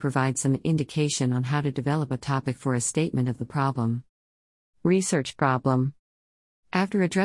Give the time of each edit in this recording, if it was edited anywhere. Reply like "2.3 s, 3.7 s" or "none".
none

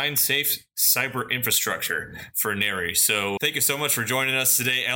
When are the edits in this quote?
3.4 s

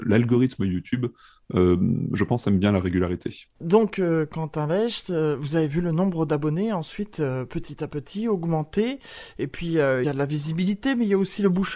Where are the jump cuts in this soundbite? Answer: none

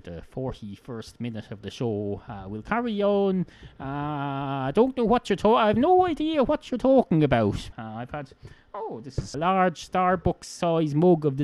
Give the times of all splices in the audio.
7.7 s, 9.3 s

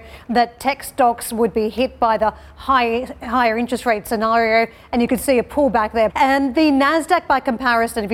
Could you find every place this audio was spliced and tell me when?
6.1 s

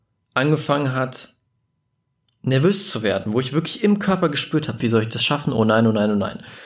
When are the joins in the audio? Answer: 4.8 s

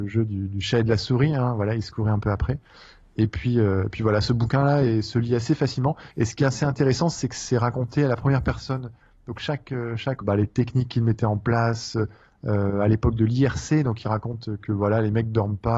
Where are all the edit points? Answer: 6.1 s, 10.2 s

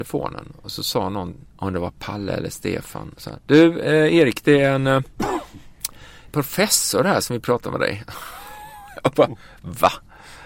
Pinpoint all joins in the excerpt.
1.5 s, 3.4 s, 6.3 s

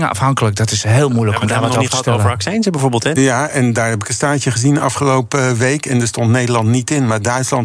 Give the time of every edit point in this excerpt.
3.1 s

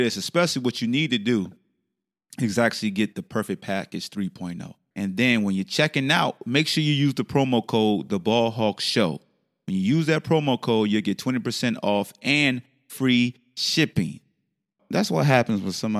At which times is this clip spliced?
4.9 s, 14.8 s

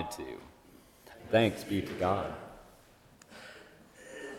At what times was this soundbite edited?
1.1 s

